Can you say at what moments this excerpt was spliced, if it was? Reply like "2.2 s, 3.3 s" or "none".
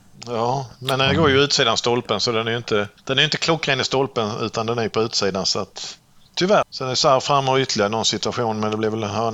3.0 s, 6.6 s